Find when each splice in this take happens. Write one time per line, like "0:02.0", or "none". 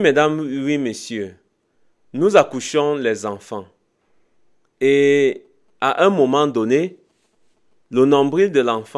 none

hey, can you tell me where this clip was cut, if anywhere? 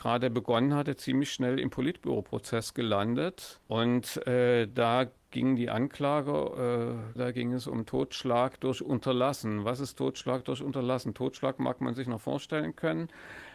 0:07.2

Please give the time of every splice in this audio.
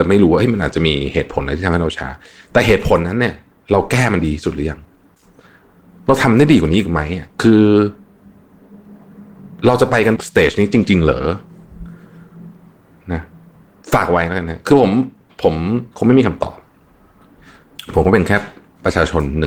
0:07.3
0:15.9

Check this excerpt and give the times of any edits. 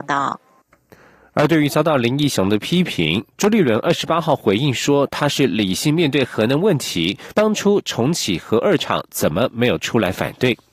0:07.3

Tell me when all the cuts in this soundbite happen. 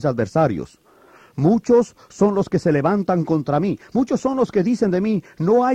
none

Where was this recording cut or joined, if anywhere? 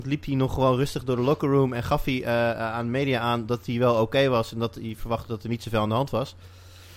none

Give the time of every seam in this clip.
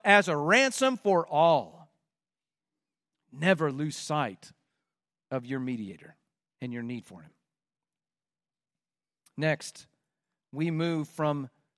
none

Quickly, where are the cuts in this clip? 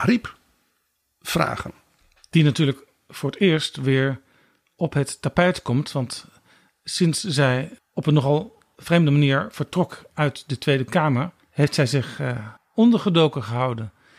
0:11.4
0:12.6

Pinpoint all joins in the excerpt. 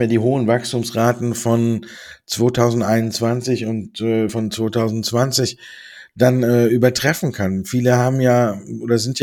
none

